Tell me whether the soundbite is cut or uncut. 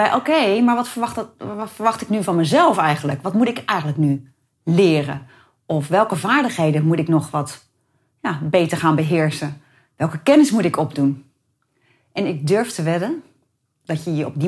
uncut